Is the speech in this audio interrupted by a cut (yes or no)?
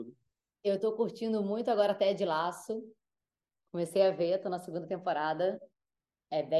no